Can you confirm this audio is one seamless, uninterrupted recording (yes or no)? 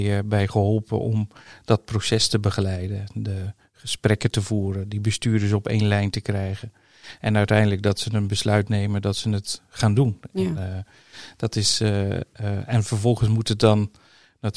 yes